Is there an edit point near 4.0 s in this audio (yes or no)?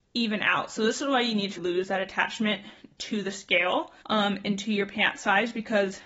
yes